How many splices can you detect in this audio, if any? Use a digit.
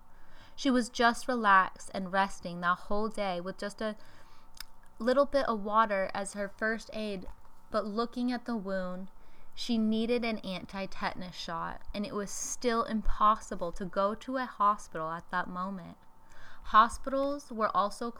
0